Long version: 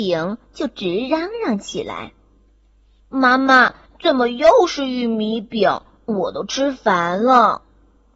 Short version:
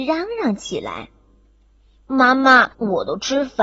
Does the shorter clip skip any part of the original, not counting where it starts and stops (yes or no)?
yes